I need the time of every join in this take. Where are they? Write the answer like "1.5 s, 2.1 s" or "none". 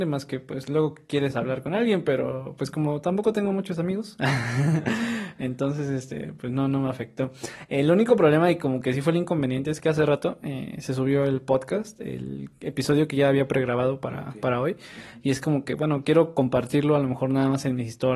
none